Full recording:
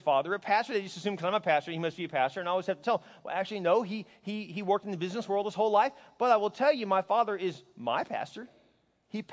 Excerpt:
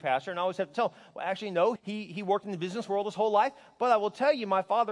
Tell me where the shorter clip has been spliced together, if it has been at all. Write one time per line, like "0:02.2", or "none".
0:01.8

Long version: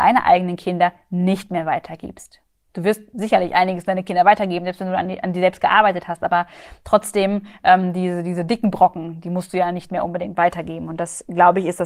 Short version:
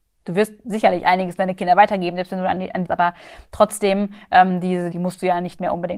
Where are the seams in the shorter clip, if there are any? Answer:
0:02.8
0:04.9

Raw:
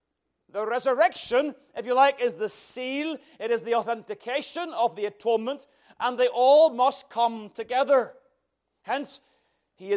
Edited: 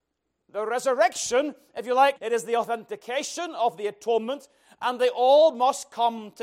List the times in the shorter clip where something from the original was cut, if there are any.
0:02.2

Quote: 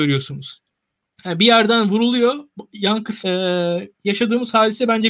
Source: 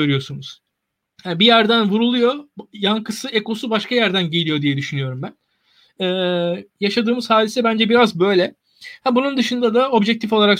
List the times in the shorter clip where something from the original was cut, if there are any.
0:03.2

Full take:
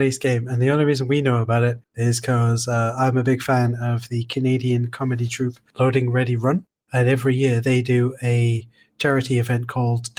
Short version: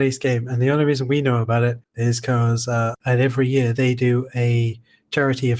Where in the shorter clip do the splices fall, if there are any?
0:02.9

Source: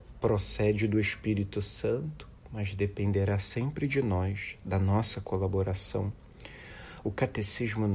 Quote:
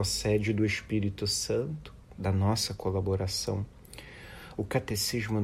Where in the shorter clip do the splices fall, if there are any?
0:02.1

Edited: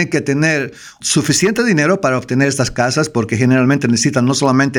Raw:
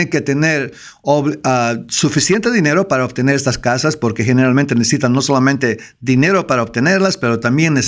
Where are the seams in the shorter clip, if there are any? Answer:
0:01.0

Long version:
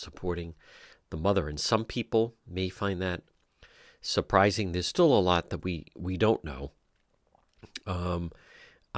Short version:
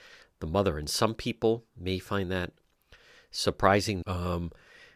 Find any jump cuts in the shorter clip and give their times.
0:04.0

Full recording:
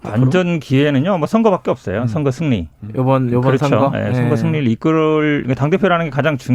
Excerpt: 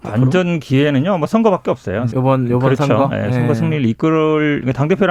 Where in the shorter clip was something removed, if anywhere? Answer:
0:02.1

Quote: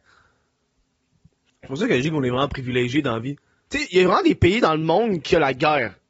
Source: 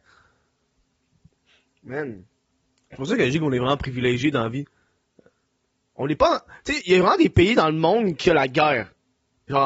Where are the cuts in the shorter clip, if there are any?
0:01.5
0:03.7

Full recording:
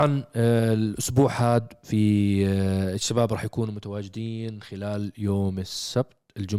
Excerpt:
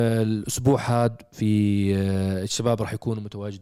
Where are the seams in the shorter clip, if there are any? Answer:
none

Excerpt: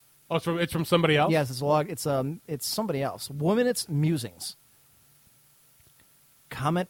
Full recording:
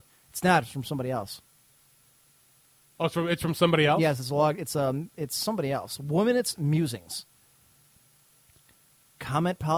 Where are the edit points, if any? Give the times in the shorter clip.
none

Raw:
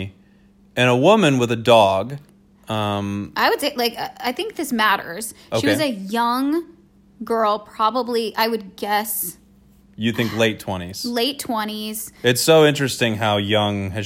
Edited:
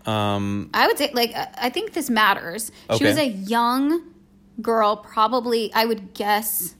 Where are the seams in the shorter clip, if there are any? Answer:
none

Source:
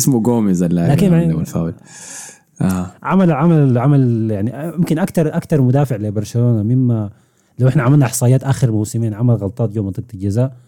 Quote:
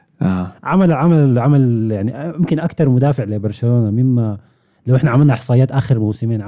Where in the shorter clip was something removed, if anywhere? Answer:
0:02.6

